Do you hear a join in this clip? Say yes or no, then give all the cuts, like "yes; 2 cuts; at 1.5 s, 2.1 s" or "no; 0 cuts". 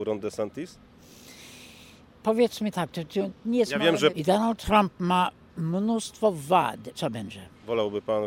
yes; 2 cuts; at 4.1 s, 6.9 s